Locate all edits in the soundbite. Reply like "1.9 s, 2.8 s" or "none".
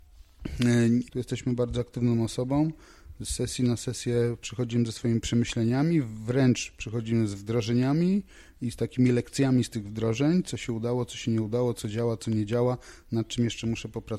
1.1 s